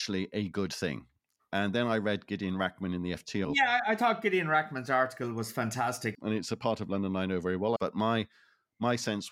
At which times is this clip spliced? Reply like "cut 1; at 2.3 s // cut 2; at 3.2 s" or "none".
cut 1; at 3.4 s // cut 2; at 6.1 s // cut 3; at 7.8 s